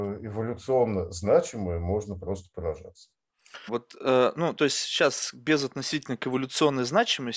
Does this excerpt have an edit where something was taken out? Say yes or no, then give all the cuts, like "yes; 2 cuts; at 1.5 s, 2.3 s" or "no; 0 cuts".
yes; 1 cut; at 3.7 s